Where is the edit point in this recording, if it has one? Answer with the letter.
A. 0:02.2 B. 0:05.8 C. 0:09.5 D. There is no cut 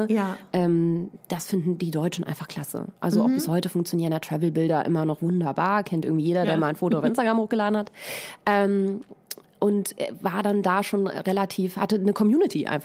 D